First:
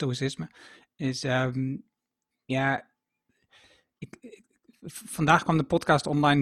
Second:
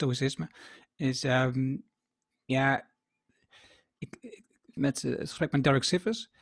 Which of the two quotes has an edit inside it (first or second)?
second